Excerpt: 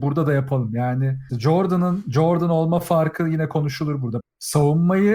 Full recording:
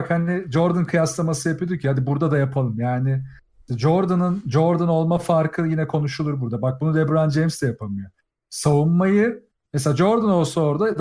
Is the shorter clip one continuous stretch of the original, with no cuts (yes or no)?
no